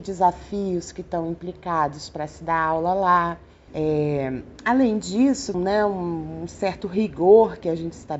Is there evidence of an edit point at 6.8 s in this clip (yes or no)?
no